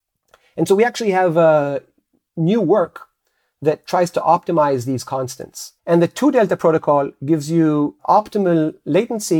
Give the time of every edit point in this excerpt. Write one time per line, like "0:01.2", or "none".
0:05.8
0:08.0